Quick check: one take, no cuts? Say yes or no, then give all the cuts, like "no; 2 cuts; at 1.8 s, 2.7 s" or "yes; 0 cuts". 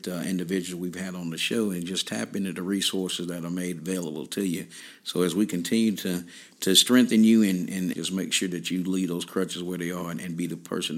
no; 1 cut; at 7.9 s